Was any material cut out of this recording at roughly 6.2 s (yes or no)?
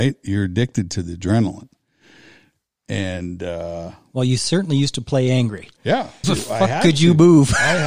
yes